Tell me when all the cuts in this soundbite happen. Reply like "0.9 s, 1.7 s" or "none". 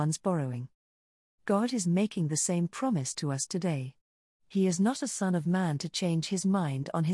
1.4 s